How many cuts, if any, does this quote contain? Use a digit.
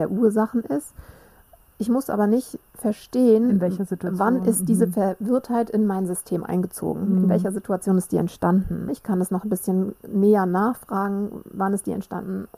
1